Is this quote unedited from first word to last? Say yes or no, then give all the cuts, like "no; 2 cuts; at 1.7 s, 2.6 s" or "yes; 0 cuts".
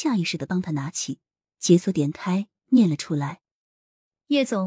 yes; 0 cuts